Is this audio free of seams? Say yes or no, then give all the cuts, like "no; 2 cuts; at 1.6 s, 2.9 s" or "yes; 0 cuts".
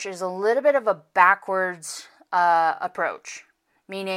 yes; 0 cuts